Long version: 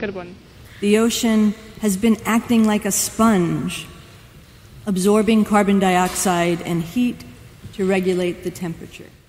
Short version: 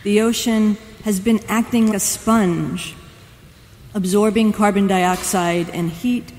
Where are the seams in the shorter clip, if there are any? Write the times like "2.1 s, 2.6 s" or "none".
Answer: 1.9 s